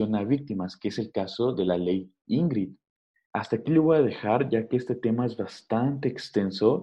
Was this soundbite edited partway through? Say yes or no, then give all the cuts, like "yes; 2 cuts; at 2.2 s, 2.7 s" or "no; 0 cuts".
yes; 1 cut; at 3.3 s